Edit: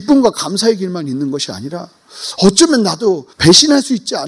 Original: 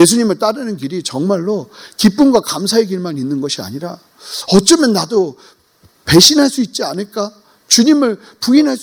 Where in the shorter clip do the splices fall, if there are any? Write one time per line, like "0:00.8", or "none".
0:03.3

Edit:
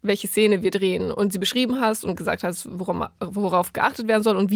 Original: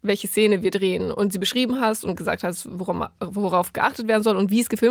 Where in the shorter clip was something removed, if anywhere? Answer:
none

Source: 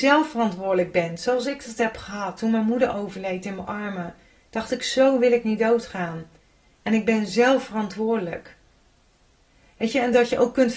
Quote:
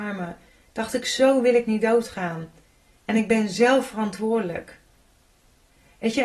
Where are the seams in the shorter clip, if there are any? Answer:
none

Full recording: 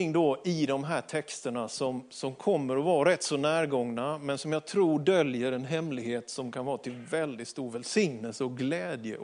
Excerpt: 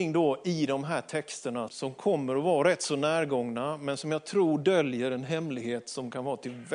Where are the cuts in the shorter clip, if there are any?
0:01.7

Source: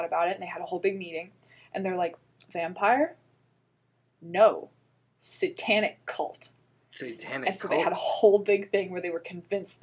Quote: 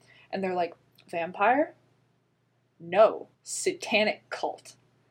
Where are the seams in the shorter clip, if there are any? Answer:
0:03.3

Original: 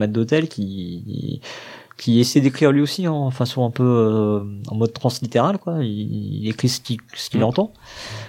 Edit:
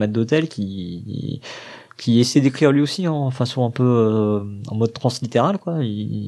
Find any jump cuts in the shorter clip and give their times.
none

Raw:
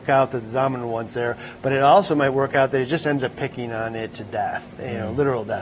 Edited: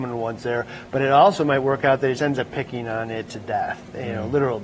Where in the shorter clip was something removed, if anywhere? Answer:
0:02.2

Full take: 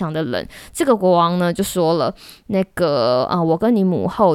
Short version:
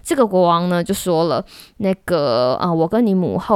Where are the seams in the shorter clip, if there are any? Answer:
none

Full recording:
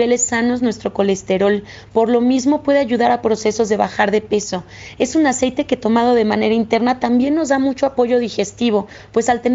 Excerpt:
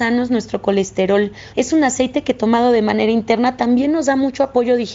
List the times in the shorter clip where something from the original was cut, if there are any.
0:01.5

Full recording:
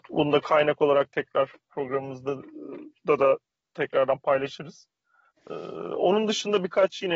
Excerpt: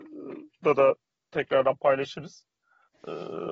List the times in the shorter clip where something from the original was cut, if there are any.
none

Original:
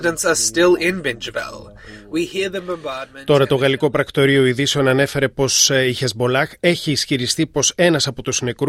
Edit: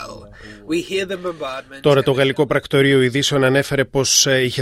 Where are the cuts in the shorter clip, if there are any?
none

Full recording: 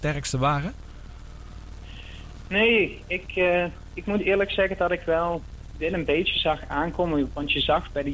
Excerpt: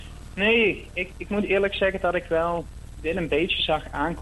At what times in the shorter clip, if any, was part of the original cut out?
0:01.1

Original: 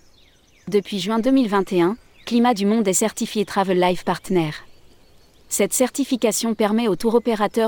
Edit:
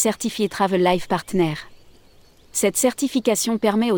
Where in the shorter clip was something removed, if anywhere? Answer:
none

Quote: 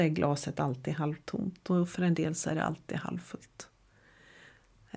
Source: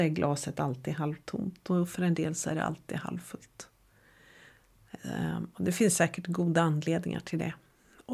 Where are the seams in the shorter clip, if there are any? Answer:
none

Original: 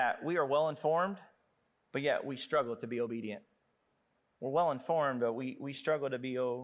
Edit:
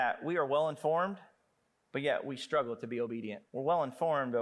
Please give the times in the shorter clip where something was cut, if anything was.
0:03.5

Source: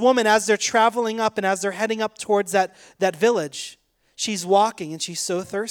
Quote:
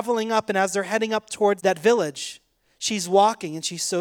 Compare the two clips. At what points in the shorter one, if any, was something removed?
0:01.6

